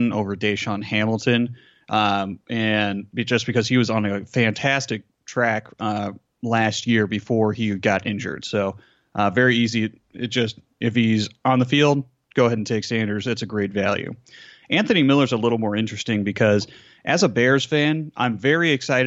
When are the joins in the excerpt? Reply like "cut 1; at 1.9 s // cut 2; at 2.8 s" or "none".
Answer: none